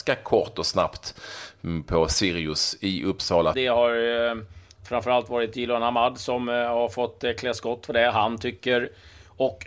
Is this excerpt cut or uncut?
cut